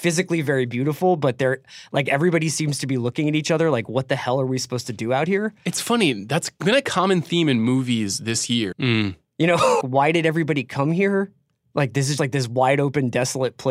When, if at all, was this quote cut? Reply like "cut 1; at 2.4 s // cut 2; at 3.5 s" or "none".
cut 1; at 8.7 s // cut 2; at 9.8 s // cut 3; at 12.2 s

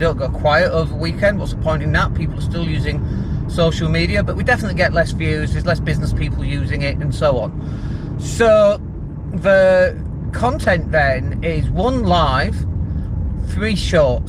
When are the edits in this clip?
none

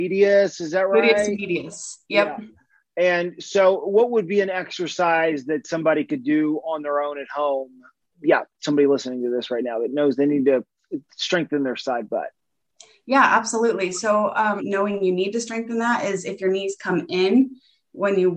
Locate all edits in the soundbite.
cut 1; at 8.0 s // cut 2; at 14.6 s

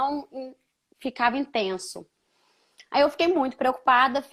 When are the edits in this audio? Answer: none

